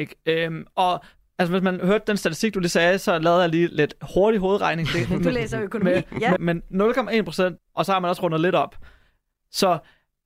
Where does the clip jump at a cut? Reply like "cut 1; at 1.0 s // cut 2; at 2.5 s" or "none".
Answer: cut 1; at 6.4 s // cut 2; at 7.6 s